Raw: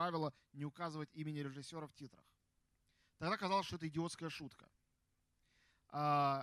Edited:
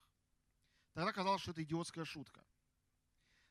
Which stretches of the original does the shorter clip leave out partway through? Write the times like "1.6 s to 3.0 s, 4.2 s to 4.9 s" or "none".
none